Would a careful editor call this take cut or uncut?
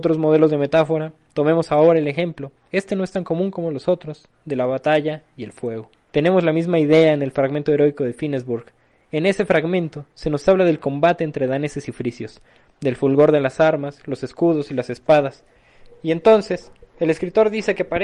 cut